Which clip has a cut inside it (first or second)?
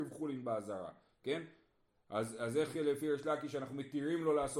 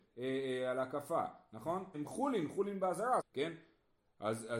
second